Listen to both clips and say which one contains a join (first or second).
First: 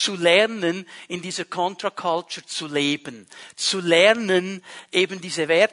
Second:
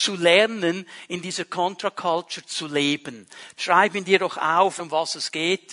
second